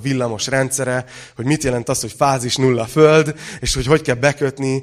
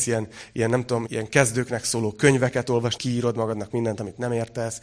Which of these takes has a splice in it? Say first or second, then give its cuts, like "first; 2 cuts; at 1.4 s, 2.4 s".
second; 2 cuts; at 1.1 s, 3.0 s